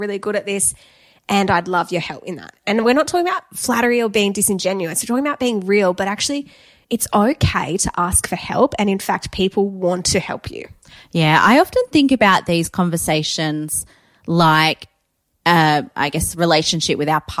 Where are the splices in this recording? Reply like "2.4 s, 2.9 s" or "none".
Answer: none

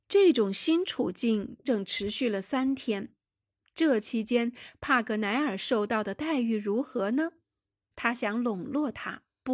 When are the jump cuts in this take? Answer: 1.6 s, 7.9 s

